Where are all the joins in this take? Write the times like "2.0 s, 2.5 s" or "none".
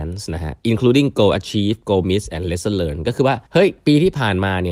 3.5 s